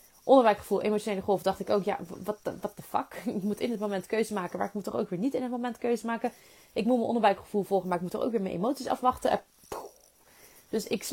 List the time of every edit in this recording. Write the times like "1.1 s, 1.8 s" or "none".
none